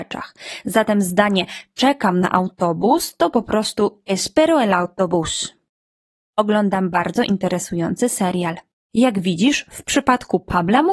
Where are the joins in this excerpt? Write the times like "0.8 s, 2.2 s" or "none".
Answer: 6.2 s